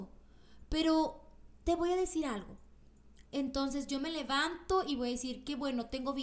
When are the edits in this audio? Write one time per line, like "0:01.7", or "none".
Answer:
0:03.3